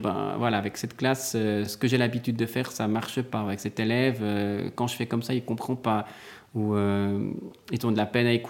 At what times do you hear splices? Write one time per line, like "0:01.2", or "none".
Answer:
none